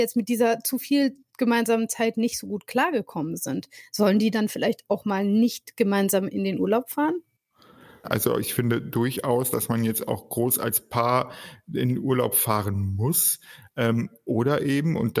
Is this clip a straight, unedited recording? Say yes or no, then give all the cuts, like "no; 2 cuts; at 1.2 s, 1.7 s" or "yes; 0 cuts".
no; 2 cuts; at 8.0 s, 9.5 s